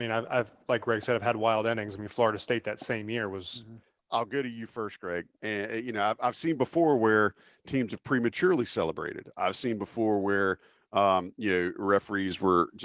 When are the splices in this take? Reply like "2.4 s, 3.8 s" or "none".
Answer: 4.0 s, 5.4 s